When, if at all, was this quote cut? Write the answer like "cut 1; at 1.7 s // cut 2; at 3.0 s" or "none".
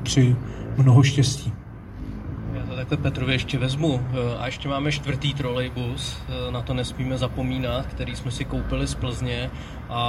none